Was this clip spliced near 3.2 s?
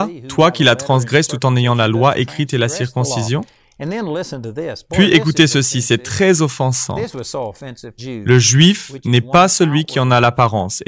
no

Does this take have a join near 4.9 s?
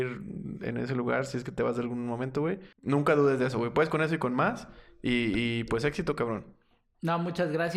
no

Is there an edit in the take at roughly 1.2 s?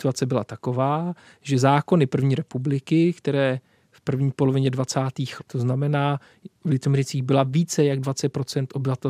no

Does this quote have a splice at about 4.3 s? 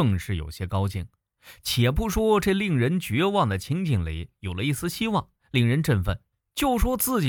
yes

